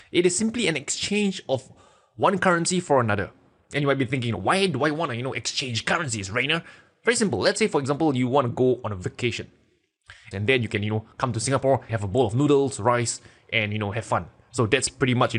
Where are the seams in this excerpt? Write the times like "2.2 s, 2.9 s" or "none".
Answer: 10.3 s, 11.9 s

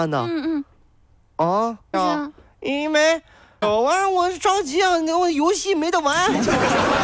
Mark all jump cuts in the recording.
1.9 s, 3.6 s

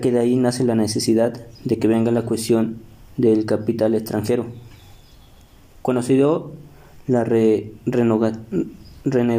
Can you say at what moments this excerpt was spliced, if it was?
none

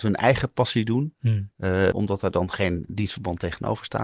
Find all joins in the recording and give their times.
1.9 s

